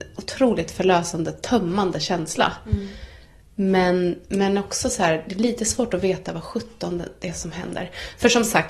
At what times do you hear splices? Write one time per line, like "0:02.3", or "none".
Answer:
none